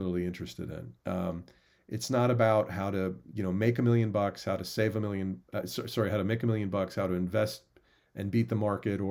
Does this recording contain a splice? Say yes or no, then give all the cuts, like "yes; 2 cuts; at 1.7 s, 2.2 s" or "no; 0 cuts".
no; 0 cuts